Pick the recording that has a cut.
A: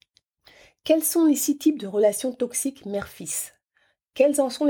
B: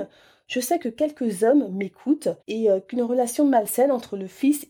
B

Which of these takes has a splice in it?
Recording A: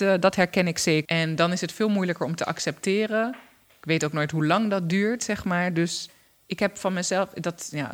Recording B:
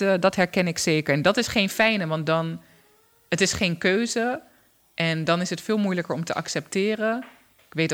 A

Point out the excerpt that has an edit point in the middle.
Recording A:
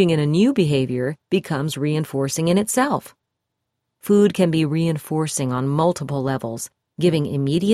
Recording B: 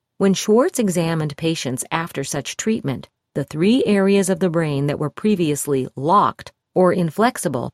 A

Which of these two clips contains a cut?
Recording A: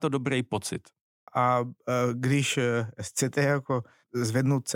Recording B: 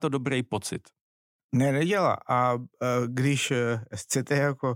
A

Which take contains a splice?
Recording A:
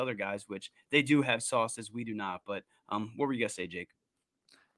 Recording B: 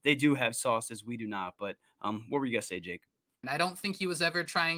B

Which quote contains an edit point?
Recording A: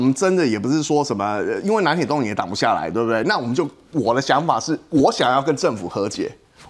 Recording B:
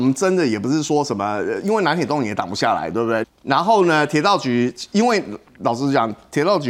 B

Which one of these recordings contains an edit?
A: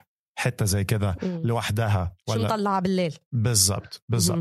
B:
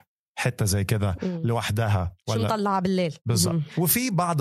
B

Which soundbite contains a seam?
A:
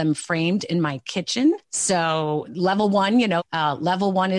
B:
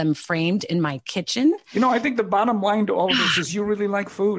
A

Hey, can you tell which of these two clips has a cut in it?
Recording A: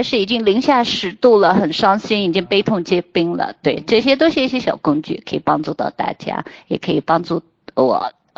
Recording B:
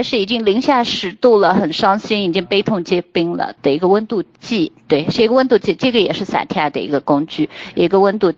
B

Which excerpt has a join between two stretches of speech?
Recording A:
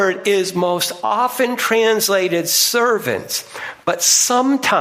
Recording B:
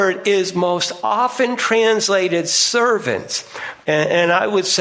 B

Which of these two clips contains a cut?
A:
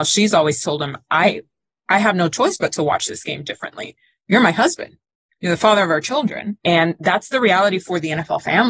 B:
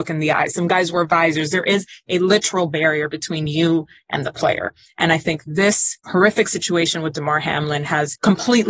A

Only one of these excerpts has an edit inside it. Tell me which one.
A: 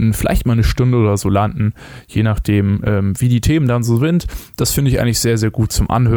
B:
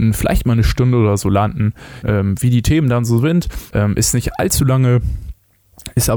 B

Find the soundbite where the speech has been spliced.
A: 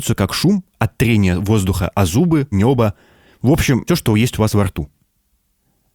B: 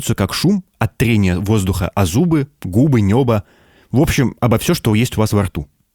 A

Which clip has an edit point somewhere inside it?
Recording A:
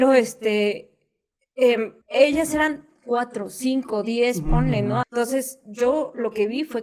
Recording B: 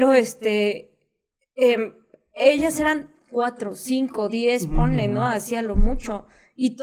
A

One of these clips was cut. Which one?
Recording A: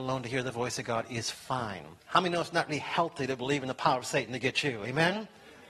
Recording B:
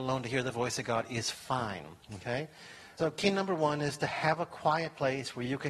A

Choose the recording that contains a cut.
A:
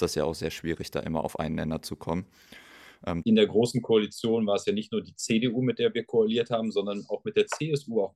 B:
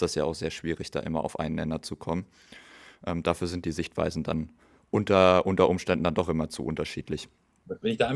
A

